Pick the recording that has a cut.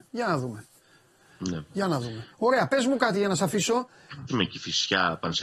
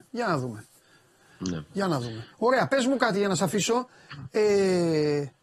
first; 1 cut; at 4.3 s

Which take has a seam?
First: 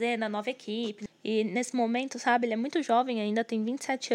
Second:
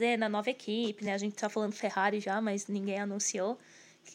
first; 1 cut; at 1.1 s

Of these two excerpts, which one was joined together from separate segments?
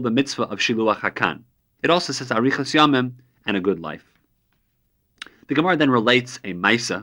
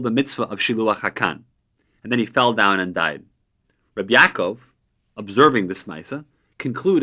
first; 1 cut; at 1.8 s

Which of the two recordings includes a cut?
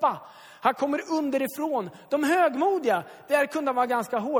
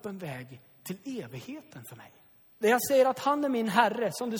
second; 1 cut; at 2.5 s

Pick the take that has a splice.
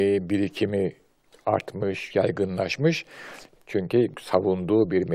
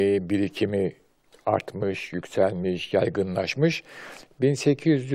first; 2 cuts; at 2.1 s, 3.6 s

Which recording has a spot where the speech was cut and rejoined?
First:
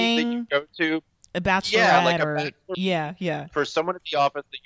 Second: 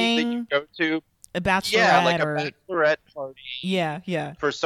first; 1 cut; at 2.7 s

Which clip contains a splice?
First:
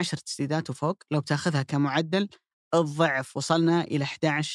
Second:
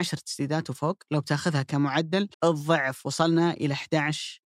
second; 1 cut; at 2.3 s

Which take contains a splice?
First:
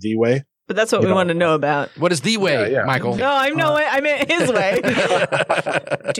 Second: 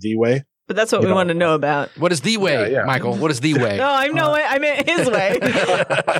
first; 1 cut; at 3.2 s

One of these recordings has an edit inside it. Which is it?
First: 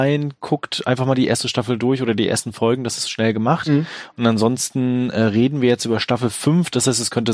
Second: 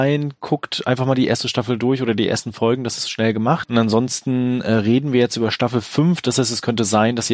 second; 1 cut; at 3.6 s

